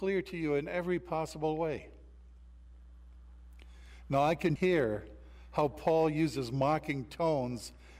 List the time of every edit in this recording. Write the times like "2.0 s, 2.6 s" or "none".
4.6 s